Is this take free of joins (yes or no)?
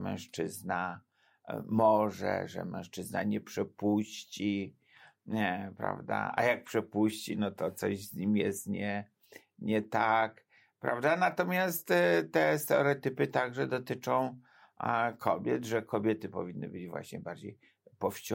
yes